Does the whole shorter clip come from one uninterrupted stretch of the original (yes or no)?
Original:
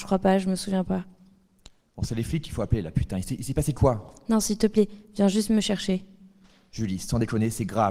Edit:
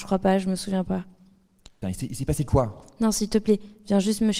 no